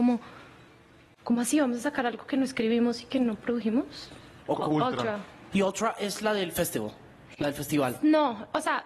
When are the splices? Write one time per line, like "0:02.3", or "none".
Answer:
0:04.4
0:05.5

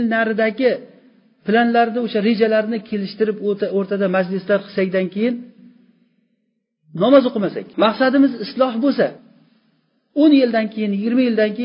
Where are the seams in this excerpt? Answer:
0:07.7

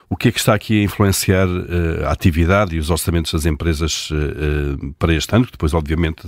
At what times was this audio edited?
none

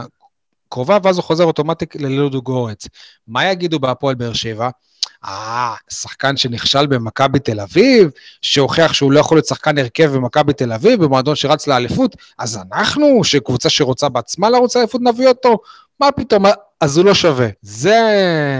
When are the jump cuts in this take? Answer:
0:17.6

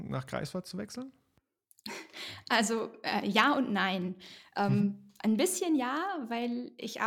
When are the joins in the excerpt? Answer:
none

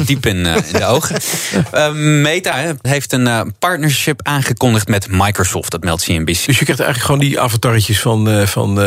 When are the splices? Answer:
0:02.8
0:06.5

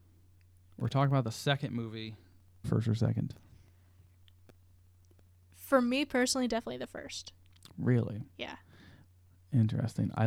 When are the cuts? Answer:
0:02.6

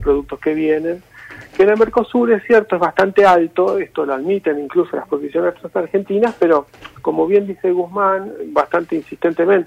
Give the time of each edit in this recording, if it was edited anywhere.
none

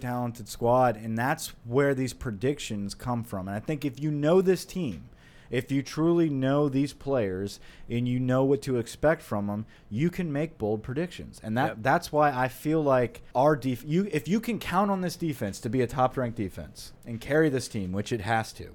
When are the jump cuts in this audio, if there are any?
0:13.3
0:17.0

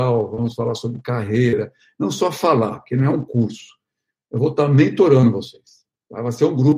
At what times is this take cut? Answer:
none

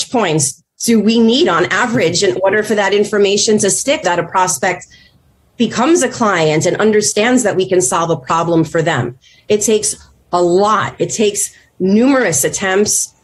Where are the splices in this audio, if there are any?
0:04.0

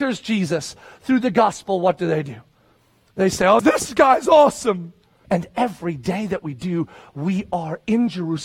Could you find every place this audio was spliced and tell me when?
0:03.6
0:05.2

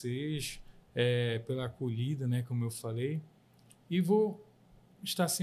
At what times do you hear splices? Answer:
none

